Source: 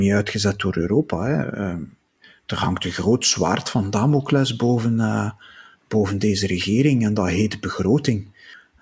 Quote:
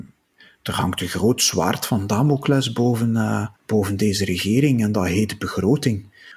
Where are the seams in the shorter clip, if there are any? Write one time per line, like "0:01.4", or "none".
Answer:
0:03.6